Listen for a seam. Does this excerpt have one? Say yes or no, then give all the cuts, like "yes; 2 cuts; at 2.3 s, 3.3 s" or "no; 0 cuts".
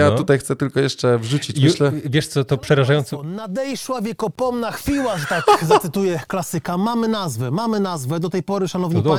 no; 0 cuts